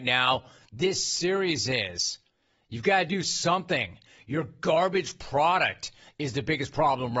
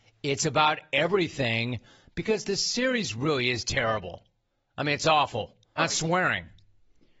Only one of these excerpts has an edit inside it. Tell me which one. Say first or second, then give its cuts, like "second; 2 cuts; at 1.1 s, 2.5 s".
second; 1 cut; at 5.8 s